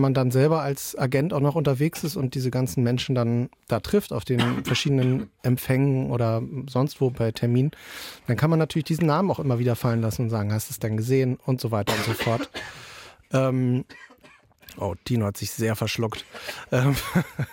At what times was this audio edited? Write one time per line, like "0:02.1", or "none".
0:07.1